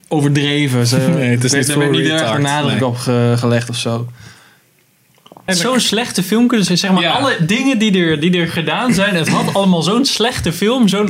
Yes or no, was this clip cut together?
yes